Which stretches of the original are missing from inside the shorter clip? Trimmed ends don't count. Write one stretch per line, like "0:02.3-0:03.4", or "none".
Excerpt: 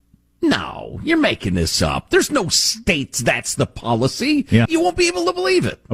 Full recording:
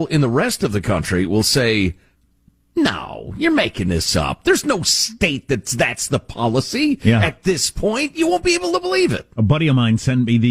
0:05.5-0:05.7
0:07.2-0:08.1